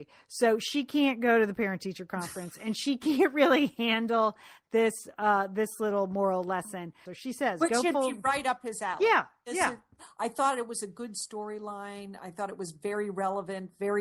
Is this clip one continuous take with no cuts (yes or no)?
no